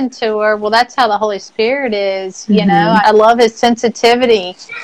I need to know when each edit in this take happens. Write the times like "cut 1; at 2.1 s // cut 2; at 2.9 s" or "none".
cut 1; at 3.0 s